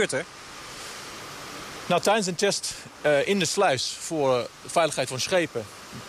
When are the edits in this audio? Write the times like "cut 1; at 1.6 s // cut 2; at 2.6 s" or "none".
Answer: none

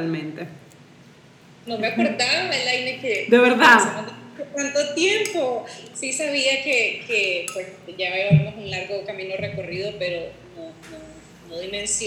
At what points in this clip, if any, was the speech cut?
cut 1; at 1.7 s

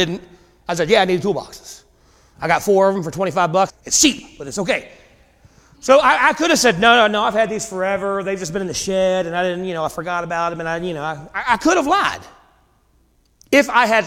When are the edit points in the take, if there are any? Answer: cut 1; at 3.7 s

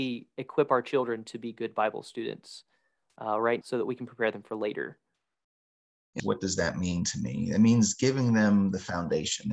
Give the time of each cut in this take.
cut 1; at 3.6 s // cut 2; at 6.2 s

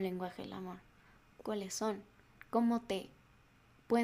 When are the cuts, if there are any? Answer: cut 1; at 1.4 s

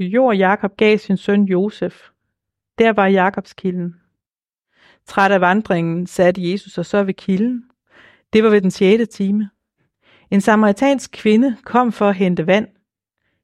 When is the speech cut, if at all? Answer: none

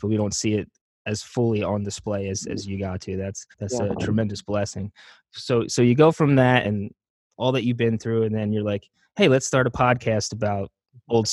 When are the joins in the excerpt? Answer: cut 1; at 3.5 s // cut 2; at 6.6 s

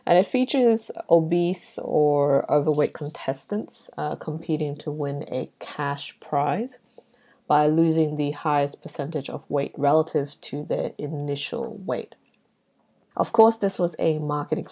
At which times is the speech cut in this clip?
none

